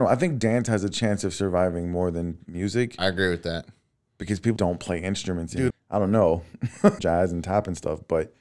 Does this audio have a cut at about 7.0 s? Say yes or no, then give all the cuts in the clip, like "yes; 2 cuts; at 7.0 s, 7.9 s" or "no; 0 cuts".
yes; 3 cuts; at 4.6 s, 5.7 s, 7.0 s